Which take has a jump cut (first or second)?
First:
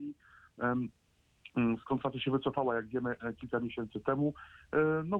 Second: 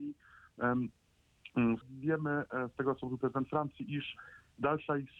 second